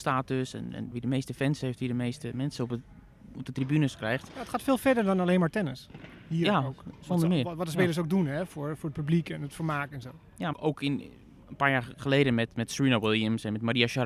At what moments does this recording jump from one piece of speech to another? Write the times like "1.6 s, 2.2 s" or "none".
0.9 s, 10.5 s